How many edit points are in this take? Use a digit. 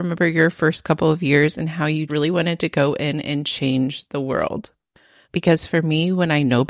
2